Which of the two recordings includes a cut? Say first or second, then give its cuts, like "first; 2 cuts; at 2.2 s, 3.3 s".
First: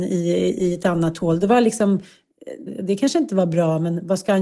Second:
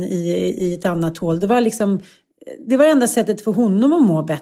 first; 1 cut; at 2.7 s